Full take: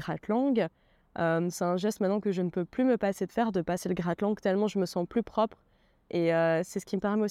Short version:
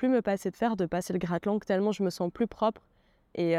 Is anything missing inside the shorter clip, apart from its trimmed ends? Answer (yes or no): no